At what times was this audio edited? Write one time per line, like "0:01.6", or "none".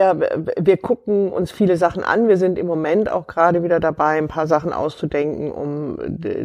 none